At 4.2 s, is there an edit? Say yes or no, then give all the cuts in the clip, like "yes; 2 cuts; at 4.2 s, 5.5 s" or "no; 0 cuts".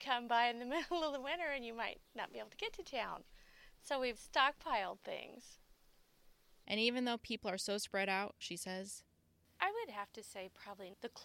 yes; 3 cuts; at 4.2 s, 6.6 s, 8.4 s